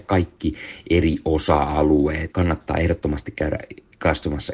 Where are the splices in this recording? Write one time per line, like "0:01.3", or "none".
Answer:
0:02.3